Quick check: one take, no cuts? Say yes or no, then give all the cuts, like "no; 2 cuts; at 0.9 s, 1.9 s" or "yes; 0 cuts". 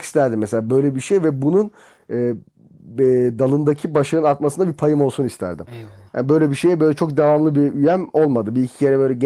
yes; 0 cuts